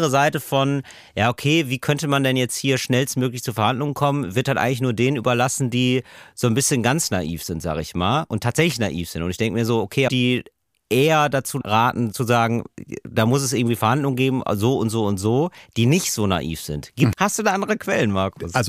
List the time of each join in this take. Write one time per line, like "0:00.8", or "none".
0:10.1
0:17.1